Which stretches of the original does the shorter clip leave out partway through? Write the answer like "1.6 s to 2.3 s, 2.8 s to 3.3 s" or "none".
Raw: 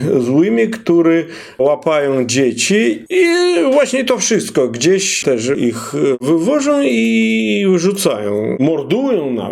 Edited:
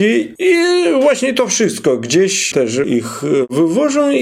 none